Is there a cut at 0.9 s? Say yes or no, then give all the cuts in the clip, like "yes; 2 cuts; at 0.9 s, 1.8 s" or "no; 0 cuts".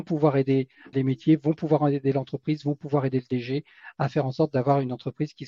yes; 1 cut; at 0.9 s